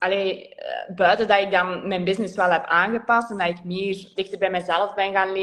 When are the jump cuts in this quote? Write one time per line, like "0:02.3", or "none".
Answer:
0:04.2